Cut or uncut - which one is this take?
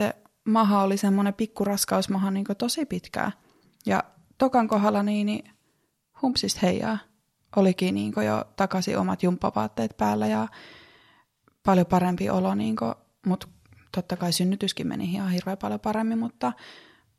uncut